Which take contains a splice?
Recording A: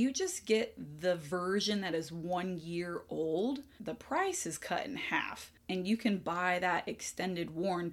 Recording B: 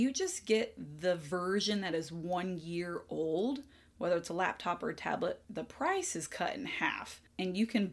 A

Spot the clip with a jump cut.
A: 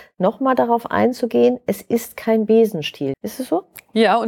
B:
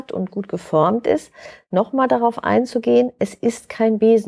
A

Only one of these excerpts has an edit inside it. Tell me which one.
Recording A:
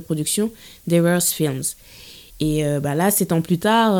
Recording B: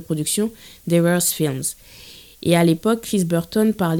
A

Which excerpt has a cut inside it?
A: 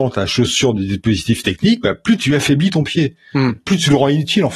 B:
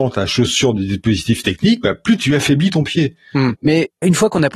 B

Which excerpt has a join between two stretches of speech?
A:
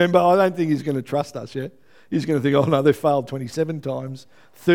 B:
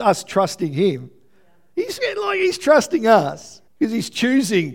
B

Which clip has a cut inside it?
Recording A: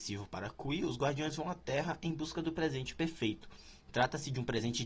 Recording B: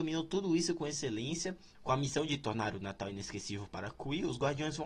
B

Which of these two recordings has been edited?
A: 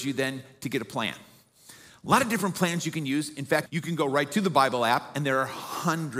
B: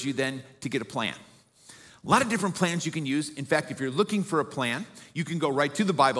A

